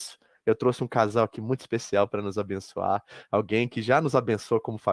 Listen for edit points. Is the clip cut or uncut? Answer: uncut